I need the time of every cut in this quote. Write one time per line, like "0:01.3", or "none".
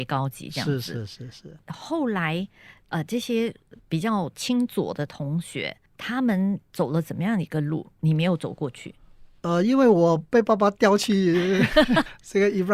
none